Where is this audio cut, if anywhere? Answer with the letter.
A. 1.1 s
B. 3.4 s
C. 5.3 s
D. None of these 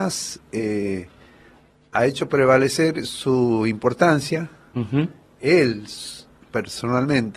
D